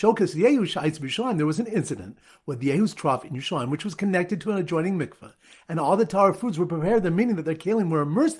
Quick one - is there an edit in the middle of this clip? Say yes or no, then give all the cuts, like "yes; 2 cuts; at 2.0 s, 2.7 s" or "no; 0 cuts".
no; 0 cuts